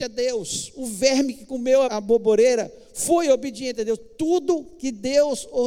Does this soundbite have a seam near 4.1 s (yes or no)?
no